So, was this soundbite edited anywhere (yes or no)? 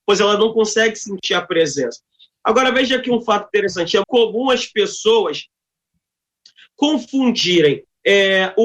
yes